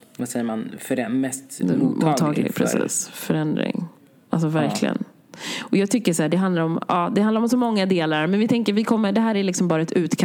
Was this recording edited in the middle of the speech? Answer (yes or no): no